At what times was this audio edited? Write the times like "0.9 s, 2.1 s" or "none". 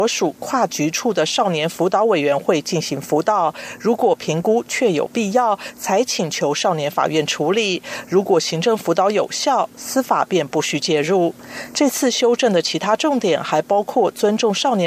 none

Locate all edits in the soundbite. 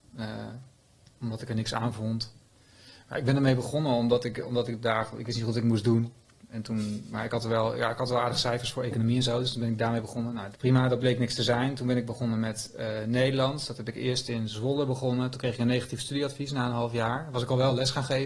10.5 s

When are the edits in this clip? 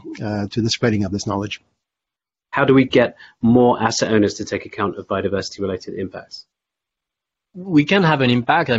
none

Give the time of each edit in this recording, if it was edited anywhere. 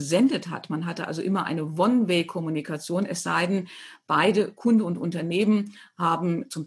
none

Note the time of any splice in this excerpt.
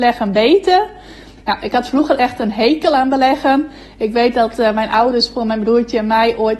1.4 s

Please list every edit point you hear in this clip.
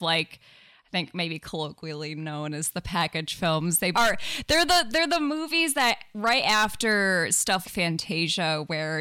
3.9 s, 7.6 s

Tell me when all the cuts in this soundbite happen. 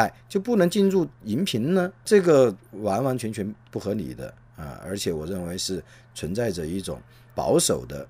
none

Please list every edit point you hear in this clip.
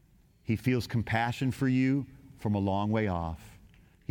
none

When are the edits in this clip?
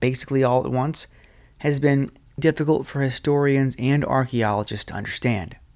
2.4 s

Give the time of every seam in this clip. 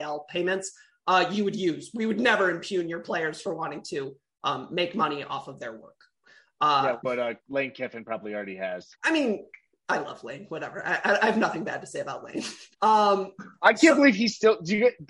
7.0 s, 8.9 s, 12.7 s

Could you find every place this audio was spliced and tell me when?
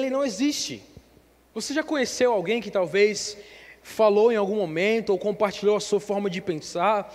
1.5 s

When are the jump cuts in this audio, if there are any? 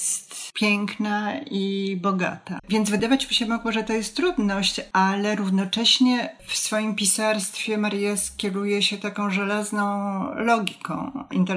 2.6 s

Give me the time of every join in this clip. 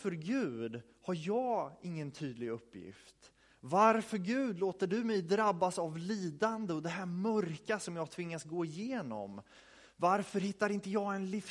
none

